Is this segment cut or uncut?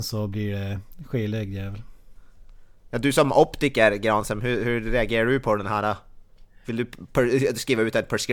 uncut